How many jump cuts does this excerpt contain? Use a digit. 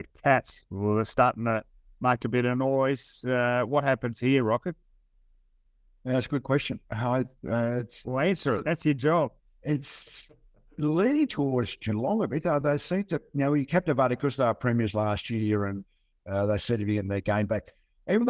0